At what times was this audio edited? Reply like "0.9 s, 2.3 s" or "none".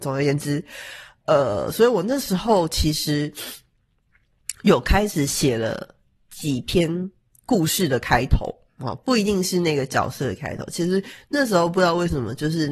none